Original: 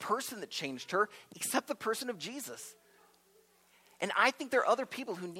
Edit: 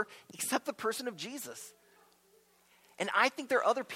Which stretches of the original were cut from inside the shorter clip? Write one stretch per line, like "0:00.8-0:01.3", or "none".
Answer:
none